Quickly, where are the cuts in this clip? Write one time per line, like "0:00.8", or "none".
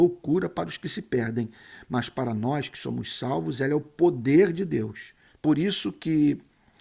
0:05.3